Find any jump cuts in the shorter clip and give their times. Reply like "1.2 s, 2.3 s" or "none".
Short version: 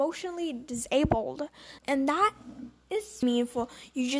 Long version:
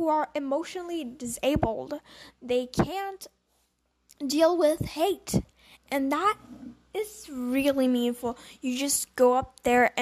1.8 s, 3.2 s

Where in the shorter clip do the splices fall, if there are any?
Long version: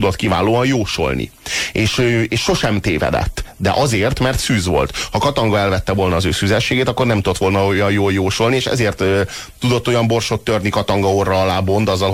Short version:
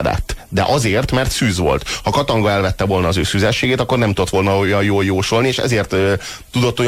none

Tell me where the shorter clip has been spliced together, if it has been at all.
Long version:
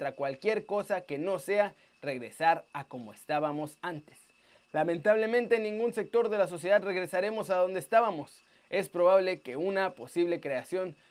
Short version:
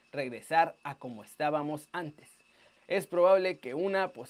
2.8 s

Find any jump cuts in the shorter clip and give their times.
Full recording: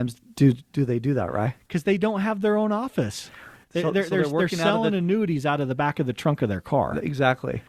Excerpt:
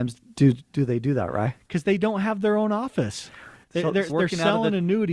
4.1 s

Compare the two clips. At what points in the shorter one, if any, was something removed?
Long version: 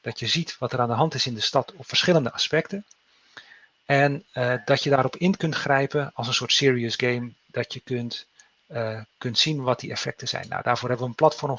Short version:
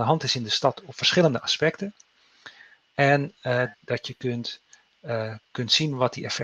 3.7 s

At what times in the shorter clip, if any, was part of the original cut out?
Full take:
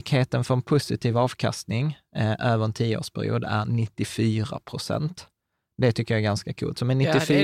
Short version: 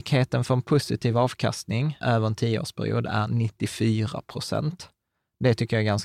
2.0 s

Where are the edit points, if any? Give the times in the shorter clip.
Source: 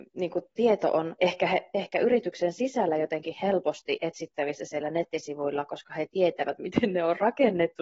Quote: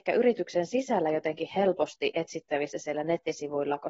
none

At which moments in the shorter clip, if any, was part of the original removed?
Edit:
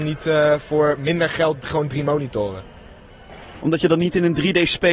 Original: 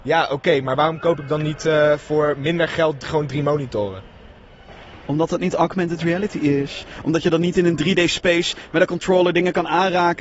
3.6 s

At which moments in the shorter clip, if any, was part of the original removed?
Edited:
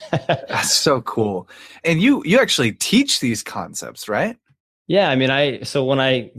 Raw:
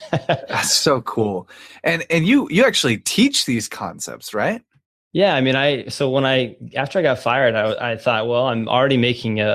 1.8 s

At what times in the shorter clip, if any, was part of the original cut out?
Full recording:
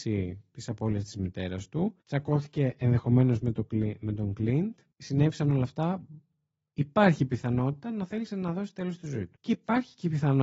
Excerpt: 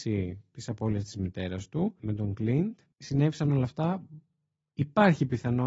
2.0 s

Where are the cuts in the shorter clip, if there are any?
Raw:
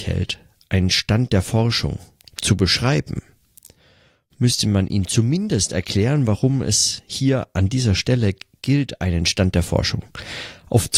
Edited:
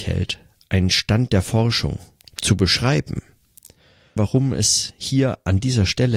4.2 s

